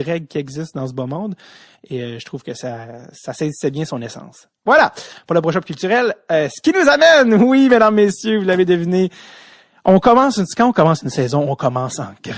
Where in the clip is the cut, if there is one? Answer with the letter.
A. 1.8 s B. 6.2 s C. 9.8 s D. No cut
A